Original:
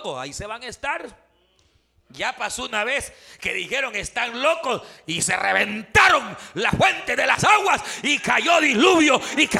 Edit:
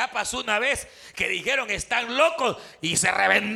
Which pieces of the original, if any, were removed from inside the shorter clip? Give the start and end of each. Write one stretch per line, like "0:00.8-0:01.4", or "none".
none